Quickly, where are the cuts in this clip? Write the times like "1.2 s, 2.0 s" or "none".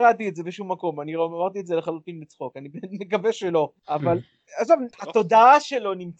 3.8 s, 4.9 s